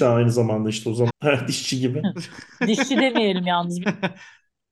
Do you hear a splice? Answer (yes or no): yes